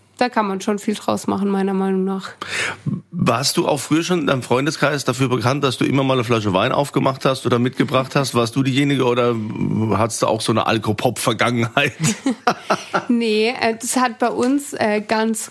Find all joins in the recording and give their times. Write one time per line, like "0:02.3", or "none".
none